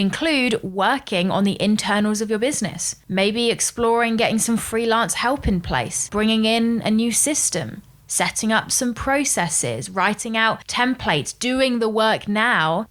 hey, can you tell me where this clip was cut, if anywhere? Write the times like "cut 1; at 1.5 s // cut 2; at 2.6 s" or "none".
none